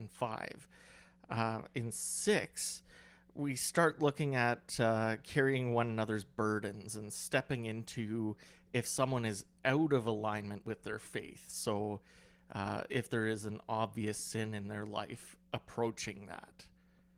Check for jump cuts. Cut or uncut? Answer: uncut